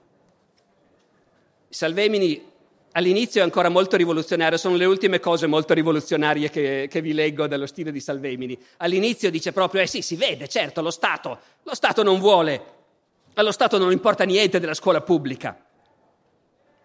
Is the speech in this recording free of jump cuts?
yes; 0 cuts

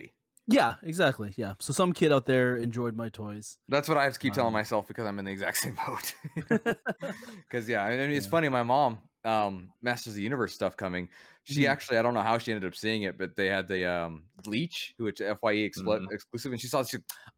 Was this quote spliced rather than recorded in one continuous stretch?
yes; 1 cut; at 9.8 s

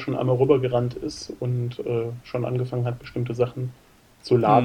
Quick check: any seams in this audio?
no; 0 cuts

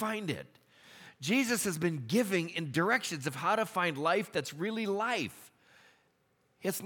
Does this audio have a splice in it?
no; 0 cuts

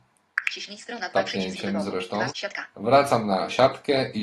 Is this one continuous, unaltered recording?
no; 1 cut; at 2.3 s

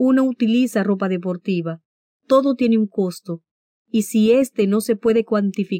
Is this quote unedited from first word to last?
no; 1 cut; at 2.1 s

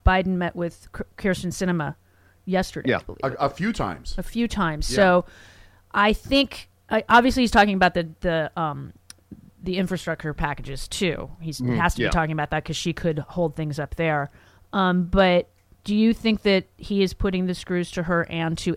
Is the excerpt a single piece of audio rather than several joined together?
yes; 0 cuts

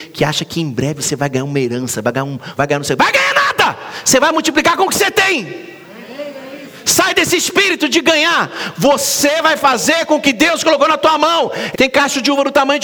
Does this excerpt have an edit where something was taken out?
yes; 2 cuts; at 2.6 s, 11.7 s

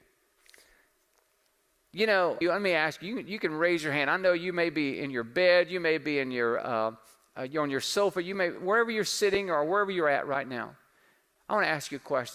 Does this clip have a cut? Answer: yes; 1 cut; at 2.4 s

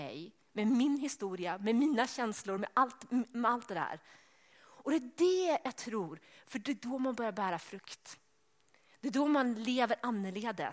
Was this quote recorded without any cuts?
yes; 0 cuts

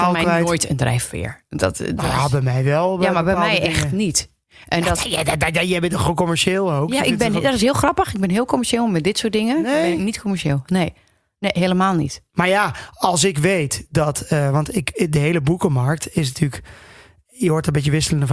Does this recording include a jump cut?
no; 0 cuts

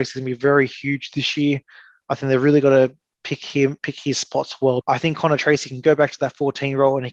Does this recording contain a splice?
yes; 1 cut; at 4.8 s

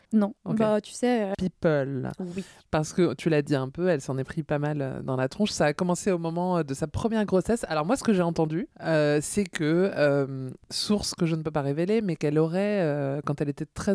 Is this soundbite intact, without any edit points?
no; 1 cut; at 1.3 s

